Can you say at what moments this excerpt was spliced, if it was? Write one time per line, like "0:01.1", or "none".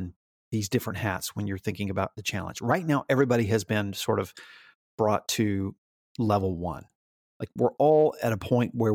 none